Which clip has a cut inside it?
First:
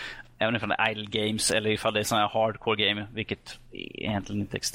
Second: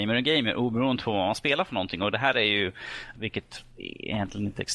second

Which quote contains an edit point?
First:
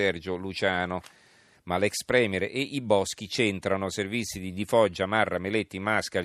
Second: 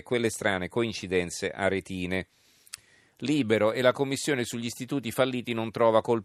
first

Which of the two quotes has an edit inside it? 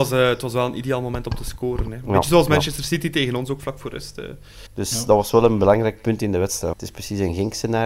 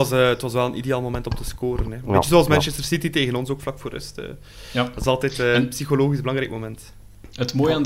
first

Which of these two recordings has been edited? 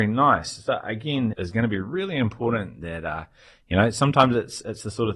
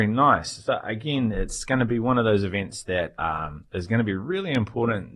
first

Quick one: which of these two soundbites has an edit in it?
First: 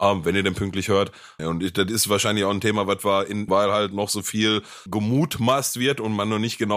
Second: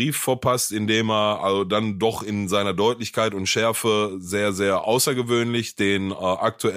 first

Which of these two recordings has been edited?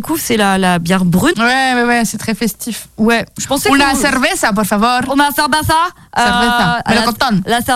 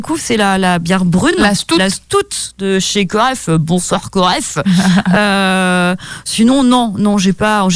first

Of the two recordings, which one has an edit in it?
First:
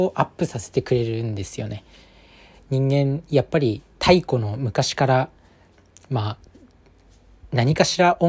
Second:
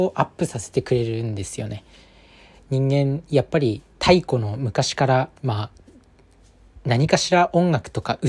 second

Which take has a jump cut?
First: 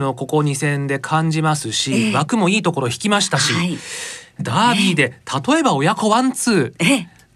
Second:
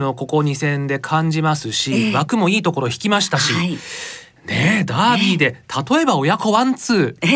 first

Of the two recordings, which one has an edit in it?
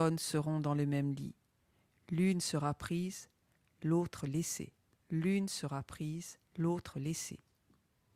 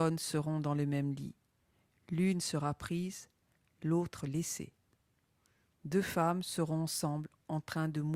first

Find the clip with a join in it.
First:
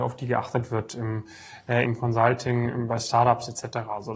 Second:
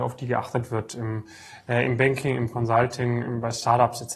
first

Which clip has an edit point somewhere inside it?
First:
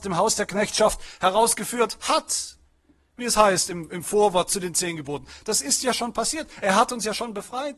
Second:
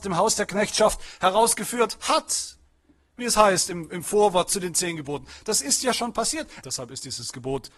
second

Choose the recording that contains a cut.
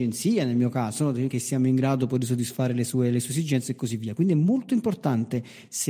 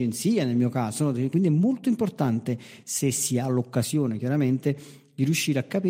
second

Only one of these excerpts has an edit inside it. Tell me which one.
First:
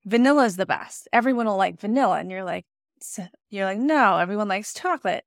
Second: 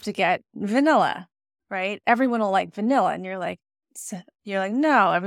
second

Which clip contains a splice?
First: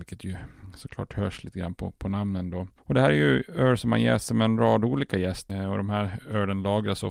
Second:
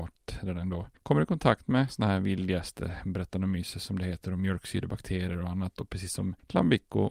first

